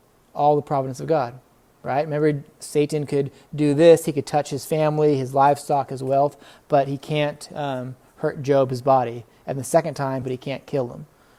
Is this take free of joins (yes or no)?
no